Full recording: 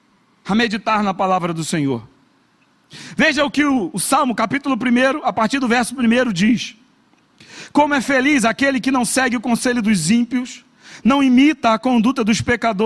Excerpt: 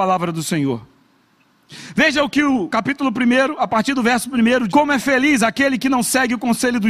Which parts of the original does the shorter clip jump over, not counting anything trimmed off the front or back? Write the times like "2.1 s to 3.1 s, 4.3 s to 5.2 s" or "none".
3.9 s to 4.4 s, 6.3 s to 7.7 s